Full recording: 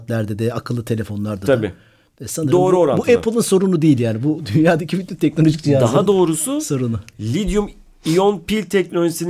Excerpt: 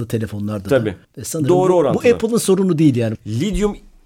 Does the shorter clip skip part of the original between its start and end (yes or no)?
yes